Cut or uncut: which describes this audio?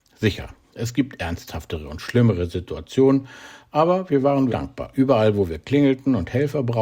cut